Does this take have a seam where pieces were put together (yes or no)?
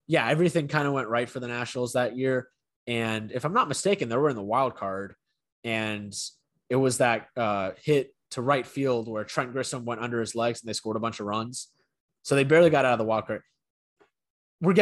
no